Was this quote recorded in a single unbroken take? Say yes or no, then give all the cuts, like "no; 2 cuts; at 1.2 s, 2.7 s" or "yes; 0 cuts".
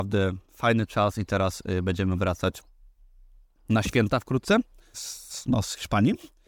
no; 1 cut; at 4.9 s